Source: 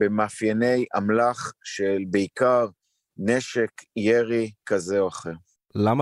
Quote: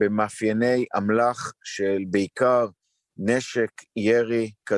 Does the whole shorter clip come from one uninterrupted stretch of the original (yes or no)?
yes